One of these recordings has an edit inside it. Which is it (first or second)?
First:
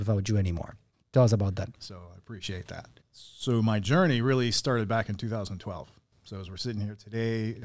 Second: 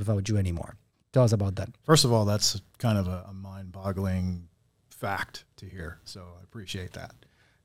first